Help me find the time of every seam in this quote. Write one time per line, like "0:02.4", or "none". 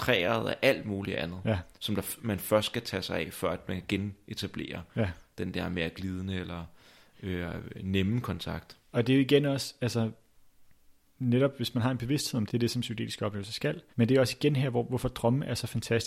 0:12.5
0:13.9

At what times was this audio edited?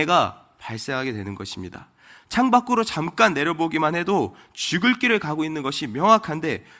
none

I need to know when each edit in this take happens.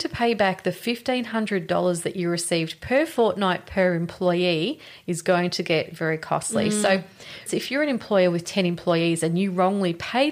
0:07.5

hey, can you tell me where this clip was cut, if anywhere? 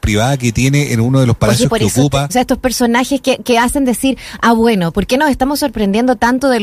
0:02.3

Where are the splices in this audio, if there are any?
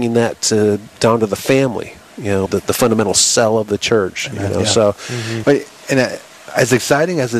0:02.5
0:05.4

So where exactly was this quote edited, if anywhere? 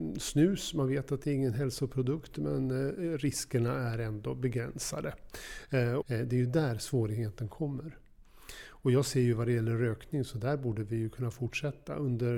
0:06.0

